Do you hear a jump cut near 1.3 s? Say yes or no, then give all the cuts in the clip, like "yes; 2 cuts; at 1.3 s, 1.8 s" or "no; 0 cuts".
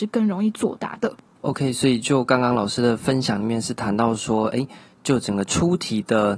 no; 0 cuts